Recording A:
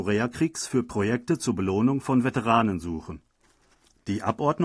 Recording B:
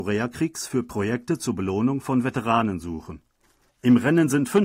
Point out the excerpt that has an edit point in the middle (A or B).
B